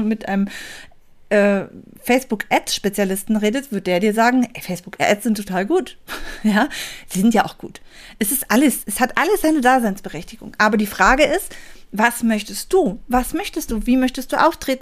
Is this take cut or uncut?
uncut